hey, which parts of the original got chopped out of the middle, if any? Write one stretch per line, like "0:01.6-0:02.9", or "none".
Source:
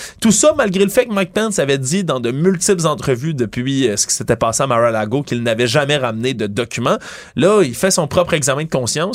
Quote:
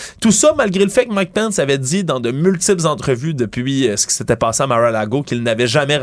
none